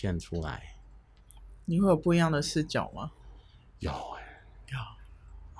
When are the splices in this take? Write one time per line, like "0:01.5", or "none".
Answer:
none